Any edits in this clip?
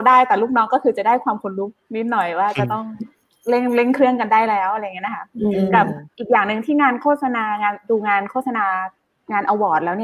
no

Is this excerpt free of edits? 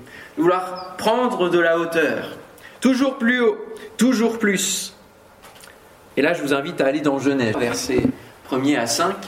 no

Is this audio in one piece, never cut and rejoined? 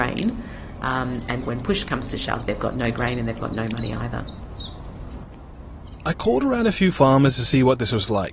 no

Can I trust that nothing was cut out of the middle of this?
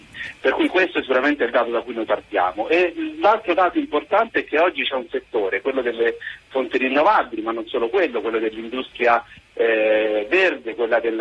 yes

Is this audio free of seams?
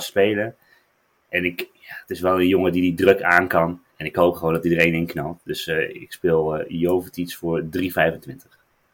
no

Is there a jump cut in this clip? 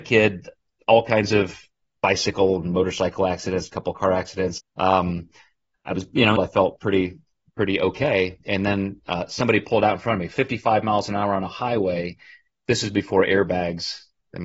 yes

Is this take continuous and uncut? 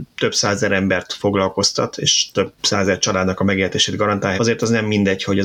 no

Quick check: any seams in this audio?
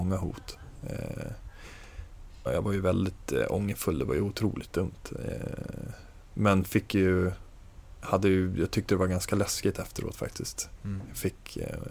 yes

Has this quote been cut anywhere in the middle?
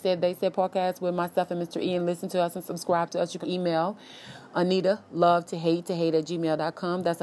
yes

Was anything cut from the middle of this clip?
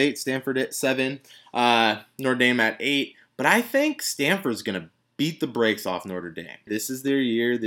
yes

